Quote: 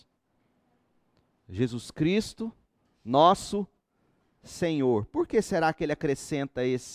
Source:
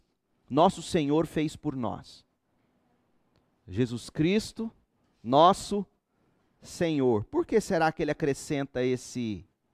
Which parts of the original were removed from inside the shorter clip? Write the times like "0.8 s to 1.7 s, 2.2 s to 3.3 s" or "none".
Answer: none